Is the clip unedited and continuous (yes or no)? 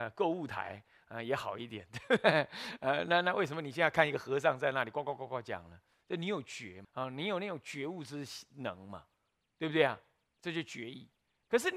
no